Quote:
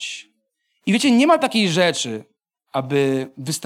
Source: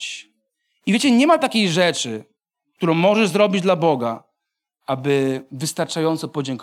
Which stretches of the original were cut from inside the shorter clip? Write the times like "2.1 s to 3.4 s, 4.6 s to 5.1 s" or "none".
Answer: 2.5 s to 4.7 s